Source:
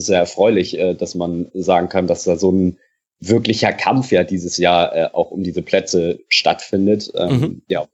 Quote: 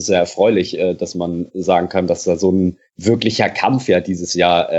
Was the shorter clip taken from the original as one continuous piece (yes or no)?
no